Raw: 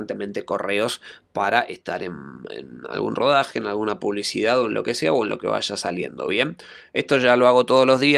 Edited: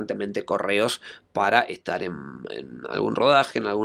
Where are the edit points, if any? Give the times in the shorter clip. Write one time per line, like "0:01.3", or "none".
none